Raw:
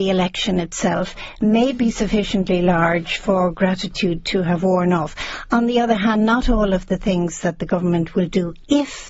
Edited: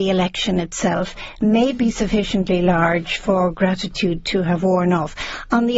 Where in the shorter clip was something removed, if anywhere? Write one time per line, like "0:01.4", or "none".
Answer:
none